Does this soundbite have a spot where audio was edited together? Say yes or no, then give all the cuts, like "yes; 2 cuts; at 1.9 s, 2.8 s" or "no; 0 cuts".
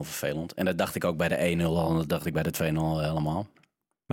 no; 0 cuts